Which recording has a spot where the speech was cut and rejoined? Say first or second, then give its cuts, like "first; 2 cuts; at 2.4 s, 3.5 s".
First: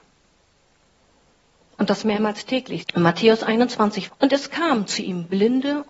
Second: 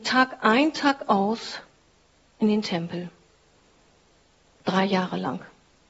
first; 2 cuts; at 2.8 s, 4.1 s